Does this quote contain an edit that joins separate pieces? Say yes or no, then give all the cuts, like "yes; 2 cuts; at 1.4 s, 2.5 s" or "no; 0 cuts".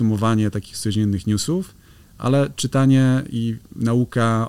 no; 0 cuts